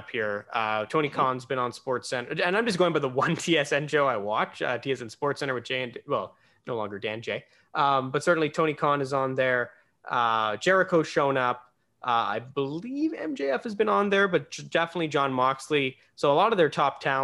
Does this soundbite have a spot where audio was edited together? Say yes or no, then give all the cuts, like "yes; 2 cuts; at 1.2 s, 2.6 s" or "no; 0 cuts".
no; 0 cuts